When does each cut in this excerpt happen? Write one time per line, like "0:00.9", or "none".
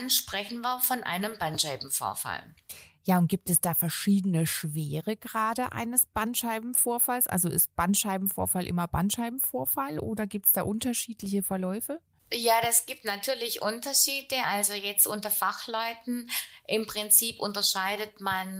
none